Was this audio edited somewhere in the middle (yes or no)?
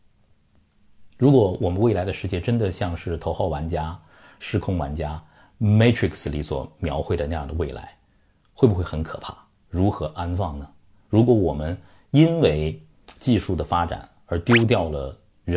yes